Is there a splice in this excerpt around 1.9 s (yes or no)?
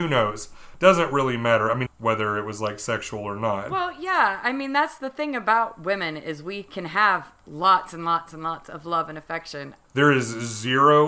yes